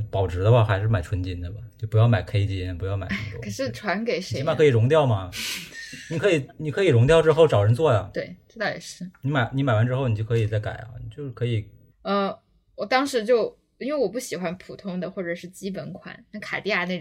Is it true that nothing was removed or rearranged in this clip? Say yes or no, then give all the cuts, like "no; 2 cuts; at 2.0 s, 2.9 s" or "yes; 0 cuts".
no; 1 cut; at 11.9 s